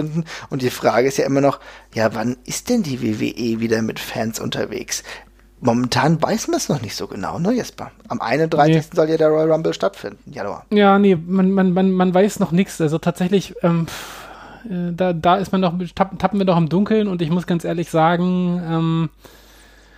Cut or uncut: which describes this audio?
uncut